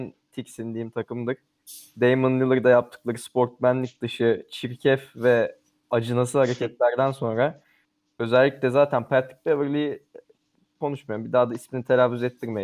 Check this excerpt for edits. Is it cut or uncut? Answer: uncut